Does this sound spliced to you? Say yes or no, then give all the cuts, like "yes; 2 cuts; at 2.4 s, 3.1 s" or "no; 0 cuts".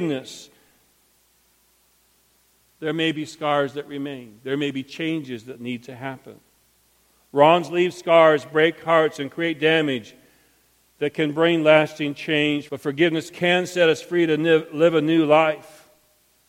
yes; 1 cut; at 12.7 s